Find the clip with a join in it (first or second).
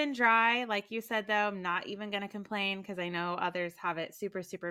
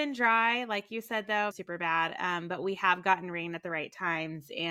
second